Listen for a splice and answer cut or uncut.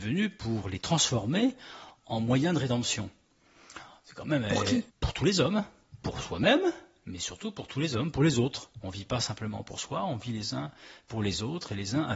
cut